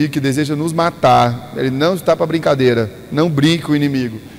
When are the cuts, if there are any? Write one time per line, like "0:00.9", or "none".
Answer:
none